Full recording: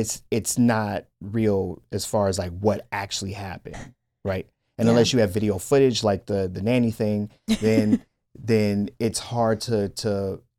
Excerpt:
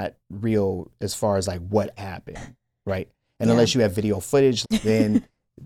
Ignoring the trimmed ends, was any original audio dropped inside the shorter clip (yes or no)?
yes